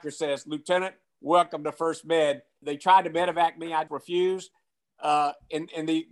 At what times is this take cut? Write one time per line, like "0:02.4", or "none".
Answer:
0:02.6
0:03.9